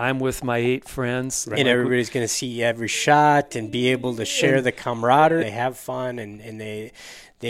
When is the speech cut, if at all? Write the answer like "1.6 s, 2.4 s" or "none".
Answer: 1.5 s, 5.4 s